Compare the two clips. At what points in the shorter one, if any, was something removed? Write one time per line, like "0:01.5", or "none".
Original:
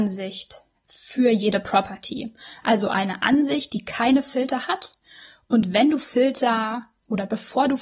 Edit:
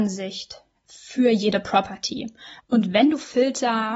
0:02.6